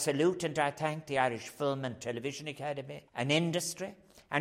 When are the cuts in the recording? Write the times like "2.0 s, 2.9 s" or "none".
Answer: 3.1 s